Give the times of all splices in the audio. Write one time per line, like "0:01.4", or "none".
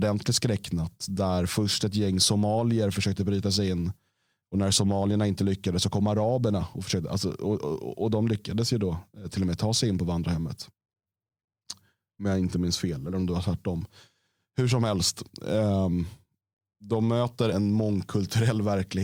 0:17.5

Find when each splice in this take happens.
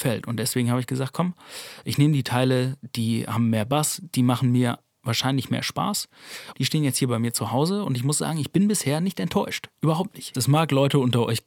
0:06.5
0:10.3

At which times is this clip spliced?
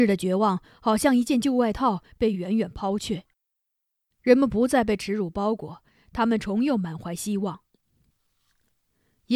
none

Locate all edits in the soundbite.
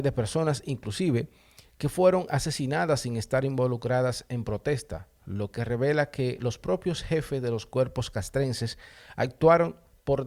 none

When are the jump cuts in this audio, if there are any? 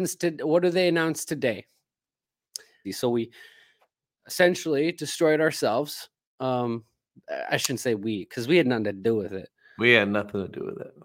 0:02.8

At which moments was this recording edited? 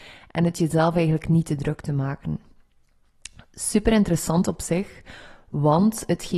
none

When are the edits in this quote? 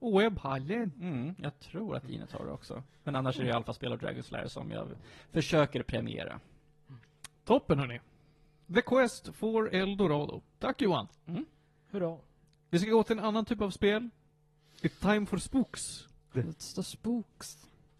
0:12.6
0:16.4

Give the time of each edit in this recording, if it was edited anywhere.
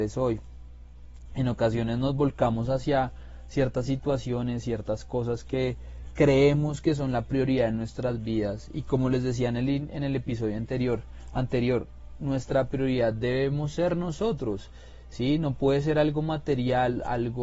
none

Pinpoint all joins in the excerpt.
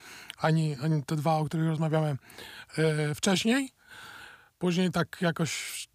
none

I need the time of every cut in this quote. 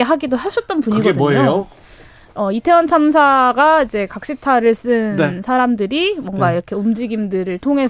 none

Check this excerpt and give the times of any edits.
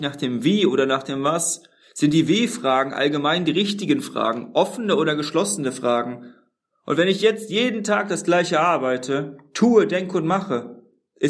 none

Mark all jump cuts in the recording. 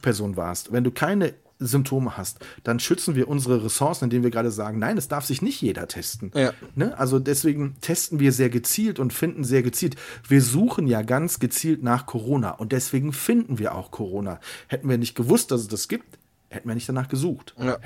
none

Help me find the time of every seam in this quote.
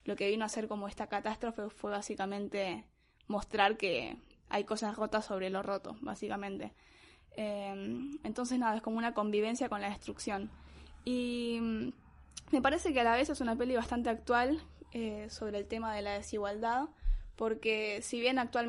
none

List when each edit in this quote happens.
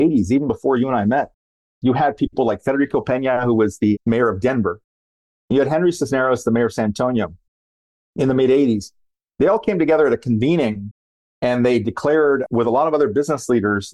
0:05.3

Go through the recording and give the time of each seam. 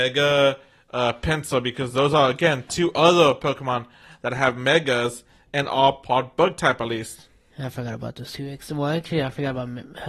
none

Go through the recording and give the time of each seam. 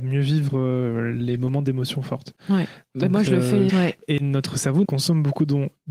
0:03.7
0:04.8

